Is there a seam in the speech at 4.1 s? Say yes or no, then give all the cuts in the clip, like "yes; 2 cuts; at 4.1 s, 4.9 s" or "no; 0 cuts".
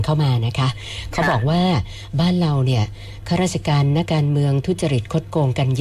yes; 1 cut; at 4.1 s